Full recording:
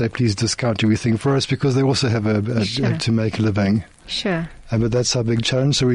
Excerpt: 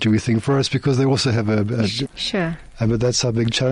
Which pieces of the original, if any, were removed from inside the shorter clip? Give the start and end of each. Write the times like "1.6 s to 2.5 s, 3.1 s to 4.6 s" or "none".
2.8 s to 3.9 s